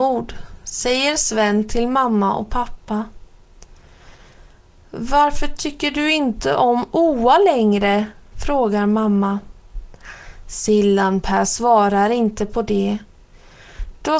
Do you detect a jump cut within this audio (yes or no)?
no